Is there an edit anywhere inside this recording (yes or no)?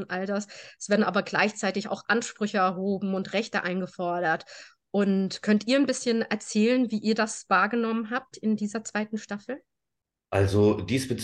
no